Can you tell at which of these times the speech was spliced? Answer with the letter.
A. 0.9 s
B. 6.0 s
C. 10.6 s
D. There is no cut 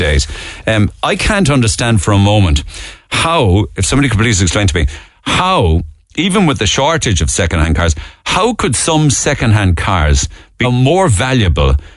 C